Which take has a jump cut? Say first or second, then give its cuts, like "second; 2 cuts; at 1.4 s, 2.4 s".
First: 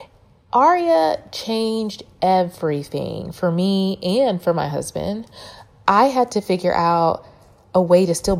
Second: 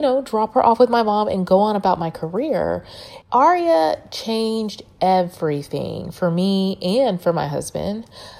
second; 1 cut; at 3.2 s